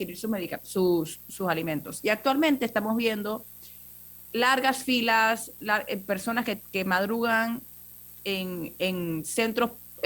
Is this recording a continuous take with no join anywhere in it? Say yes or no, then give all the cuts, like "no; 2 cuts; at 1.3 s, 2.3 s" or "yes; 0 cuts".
no; 1 cut; at 4.2 s